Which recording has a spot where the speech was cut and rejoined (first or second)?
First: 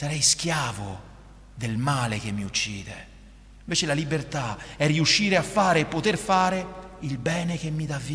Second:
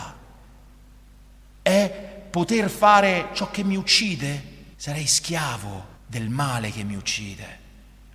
second